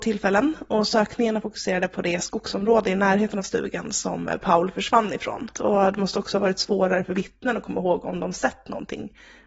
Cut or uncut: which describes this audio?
cut